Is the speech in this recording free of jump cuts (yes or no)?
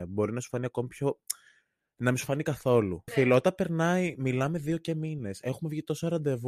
no